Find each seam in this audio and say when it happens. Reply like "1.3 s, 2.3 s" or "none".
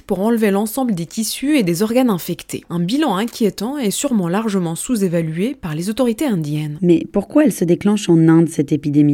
2.6 s